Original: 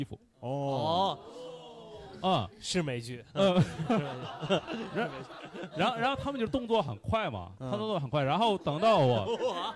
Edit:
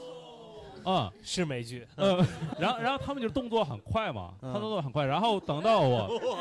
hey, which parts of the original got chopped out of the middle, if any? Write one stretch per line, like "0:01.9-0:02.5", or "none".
0:03.9-0:05.7